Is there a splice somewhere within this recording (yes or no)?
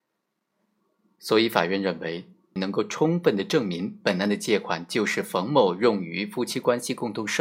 yes